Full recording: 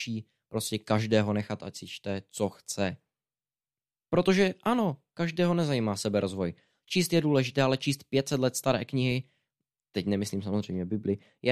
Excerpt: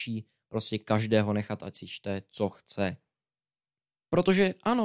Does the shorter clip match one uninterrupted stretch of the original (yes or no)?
yes